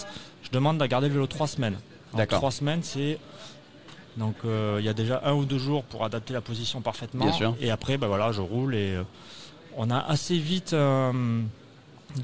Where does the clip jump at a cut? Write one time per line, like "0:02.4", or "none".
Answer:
0:04.0